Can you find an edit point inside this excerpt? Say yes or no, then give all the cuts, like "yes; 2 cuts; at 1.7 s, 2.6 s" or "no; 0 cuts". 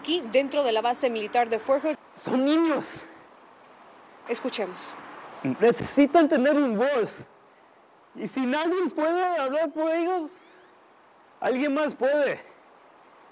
yes; 2 cuts; at 1.9 s, 4.3 s